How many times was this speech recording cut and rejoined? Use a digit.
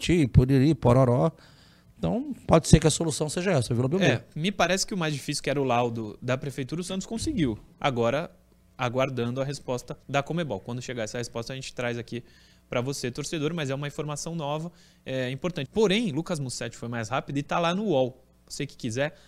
2